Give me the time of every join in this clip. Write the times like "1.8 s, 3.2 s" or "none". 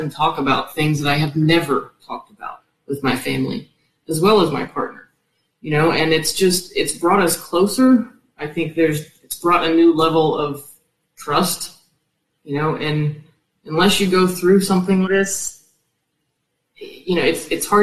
12.4 s, 15.0 s